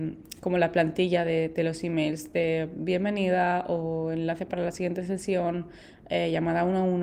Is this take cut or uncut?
uncut